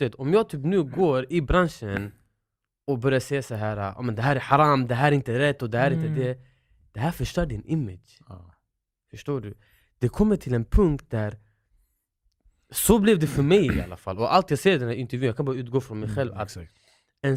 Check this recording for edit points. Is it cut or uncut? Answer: uncut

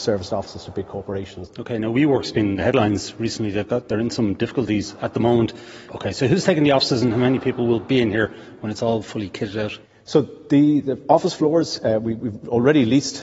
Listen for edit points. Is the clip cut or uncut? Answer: cut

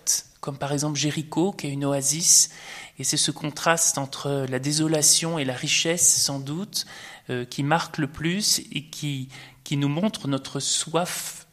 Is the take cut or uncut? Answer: uncut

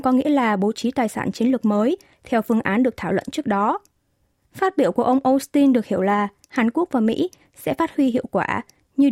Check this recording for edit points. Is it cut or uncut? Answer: cut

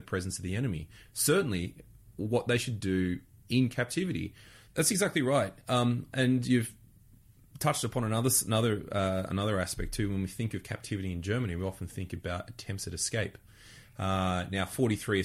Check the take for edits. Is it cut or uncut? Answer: cut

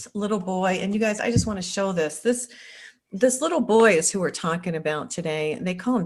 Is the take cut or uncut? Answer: uncut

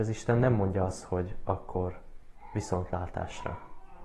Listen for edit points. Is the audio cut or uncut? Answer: uncut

